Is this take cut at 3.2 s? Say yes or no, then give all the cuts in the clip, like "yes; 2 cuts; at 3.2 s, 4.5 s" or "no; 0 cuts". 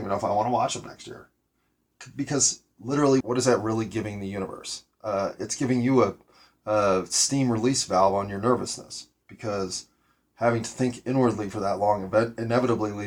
yes; 1 cut; at 3.2 s